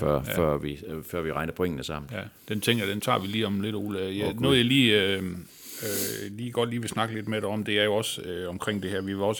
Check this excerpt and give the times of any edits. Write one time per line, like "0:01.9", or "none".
none